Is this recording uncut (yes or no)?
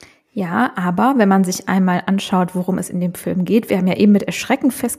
yes